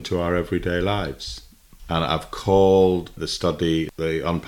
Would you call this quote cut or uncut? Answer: cut